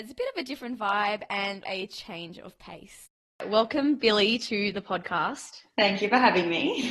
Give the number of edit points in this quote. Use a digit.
1